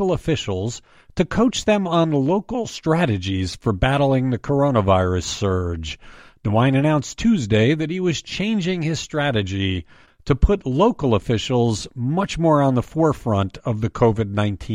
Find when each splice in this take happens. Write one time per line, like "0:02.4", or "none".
none